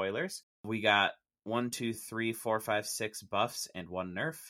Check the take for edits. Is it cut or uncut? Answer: uncut